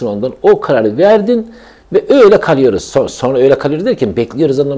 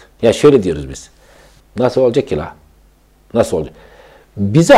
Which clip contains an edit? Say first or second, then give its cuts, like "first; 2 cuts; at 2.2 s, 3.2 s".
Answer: second; 1 cut; at 1.6 s